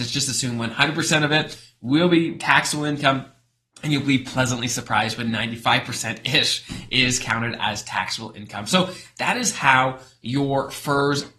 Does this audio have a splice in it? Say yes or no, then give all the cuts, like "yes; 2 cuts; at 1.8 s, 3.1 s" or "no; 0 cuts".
no; 0 cuts